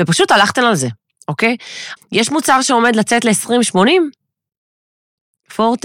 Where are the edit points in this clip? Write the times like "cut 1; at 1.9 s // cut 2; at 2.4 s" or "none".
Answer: cut 1; at 2.0 s